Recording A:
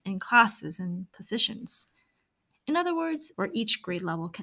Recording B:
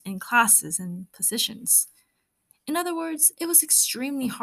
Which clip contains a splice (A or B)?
A